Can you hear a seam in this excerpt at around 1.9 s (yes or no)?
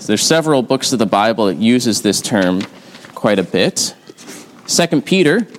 no